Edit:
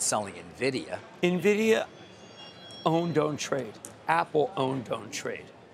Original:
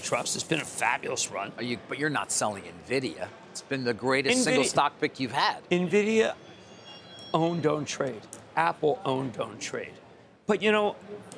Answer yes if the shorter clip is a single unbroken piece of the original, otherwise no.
no